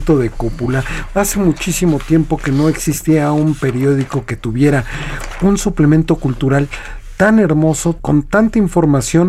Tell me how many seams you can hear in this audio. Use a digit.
1